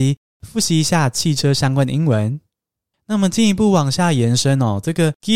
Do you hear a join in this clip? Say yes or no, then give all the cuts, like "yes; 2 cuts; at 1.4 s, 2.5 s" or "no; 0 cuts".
no; 0 cuts